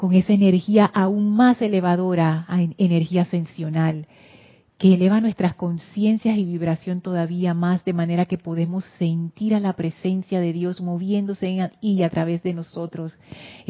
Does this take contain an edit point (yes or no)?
no